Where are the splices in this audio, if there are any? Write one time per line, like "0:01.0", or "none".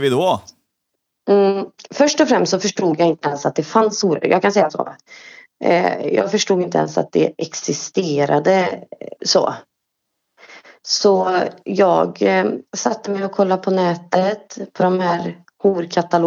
0:09.2
0:12.7